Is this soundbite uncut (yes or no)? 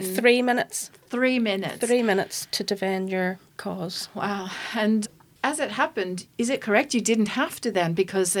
no